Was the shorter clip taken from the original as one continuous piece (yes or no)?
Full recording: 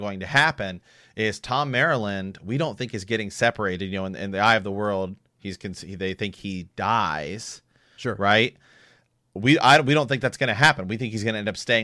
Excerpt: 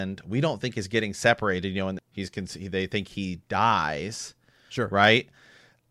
no